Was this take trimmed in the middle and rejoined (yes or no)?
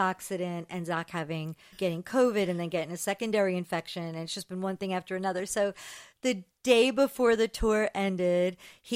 yes